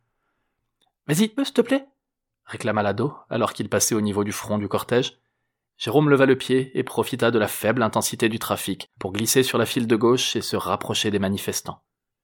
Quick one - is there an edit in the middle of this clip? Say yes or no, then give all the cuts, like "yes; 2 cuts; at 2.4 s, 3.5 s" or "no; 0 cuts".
yes; 2 cuts; at 1.4 s, 5.7 s